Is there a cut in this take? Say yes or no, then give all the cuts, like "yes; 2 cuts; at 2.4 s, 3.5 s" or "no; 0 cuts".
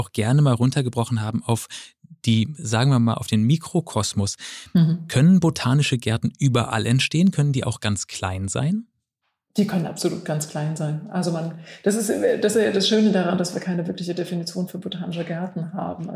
no; 0 cuts